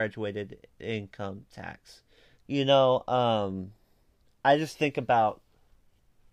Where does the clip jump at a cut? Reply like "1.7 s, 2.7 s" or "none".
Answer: 2.4 s